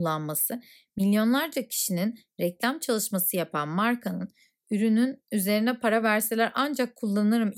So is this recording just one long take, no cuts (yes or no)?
yes